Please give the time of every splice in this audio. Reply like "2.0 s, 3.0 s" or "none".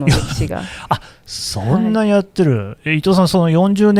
none